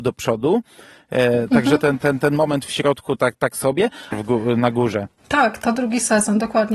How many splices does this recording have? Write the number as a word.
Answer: one